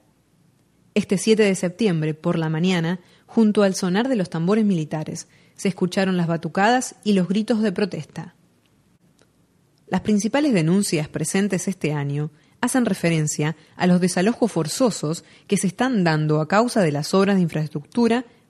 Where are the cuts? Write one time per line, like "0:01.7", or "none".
none